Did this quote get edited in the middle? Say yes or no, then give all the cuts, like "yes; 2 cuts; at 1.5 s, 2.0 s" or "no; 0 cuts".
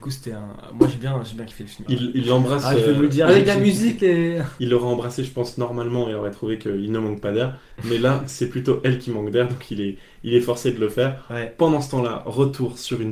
yes; 1 cut; at 1.9 s